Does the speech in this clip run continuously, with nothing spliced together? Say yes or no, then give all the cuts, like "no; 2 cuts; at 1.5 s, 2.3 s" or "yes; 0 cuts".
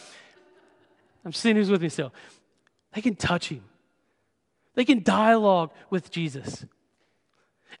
no; 1 cut; at 2.9 s